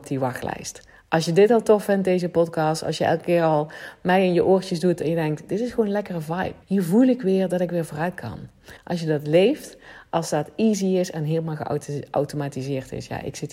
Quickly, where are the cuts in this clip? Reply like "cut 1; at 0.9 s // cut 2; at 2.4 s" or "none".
cut 1; at 6.6 s // cut 2; at 8.8 s

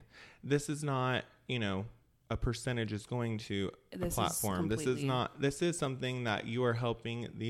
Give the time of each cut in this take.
none

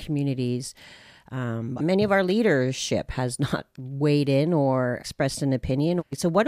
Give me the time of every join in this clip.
cut 1; at 1.8 s // cut 2; at 5.0 s

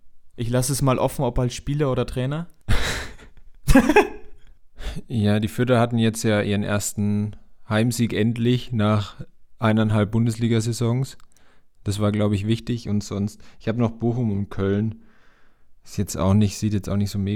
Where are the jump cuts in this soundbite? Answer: none

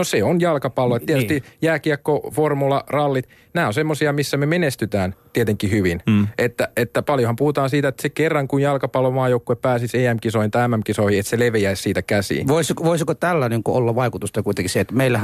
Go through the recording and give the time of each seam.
none

